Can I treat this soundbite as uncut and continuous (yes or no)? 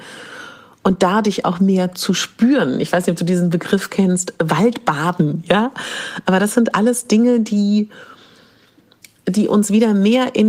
yes